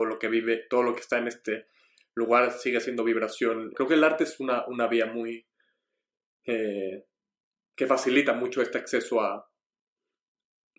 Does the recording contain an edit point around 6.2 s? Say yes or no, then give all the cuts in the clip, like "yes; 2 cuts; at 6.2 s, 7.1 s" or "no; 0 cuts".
no; 1 cut; at 3.7 s